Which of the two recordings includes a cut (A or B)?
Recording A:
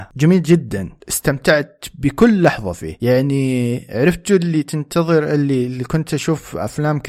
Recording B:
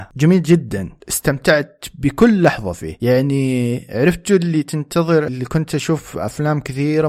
B